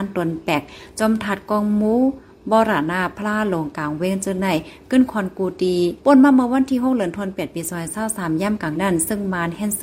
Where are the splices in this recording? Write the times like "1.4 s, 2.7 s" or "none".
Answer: 8.8 s